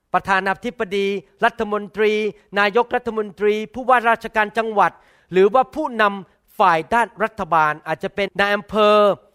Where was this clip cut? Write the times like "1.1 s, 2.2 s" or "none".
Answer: 8.3 s